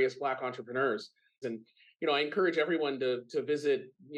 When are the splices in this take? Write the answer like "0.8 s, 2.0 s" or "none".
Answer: 1.4 s